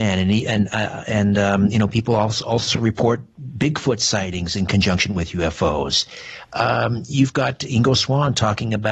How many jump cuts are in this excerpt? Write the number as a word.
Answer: zero